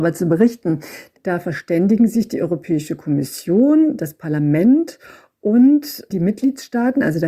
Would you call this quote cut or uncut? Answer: cut